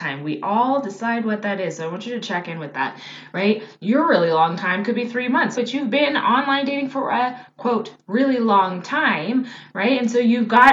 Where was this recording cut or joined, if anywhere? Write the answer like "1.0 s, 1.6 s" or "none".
5.5 s